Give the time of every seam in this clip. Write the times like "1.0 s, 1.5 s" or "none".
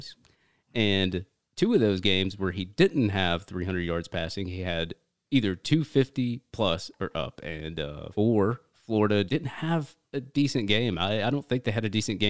8.1 s, 9.3 s